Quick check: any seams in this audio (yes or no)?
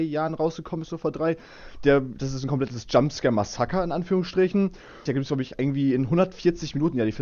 yes